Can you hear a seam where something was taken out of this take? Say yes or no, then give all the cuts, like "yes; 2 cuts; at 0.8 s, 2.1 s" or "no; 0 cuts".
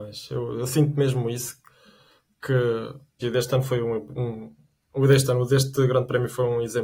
yes; 1 cut; at 3.2 s